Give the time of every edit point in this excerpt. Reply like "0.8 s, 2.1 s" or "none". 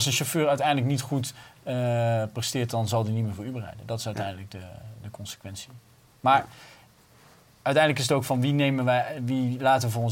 none